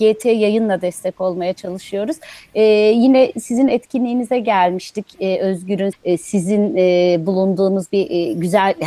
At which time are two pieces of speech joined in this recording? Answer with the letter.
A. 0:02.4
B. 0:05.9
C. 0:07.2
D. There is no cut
B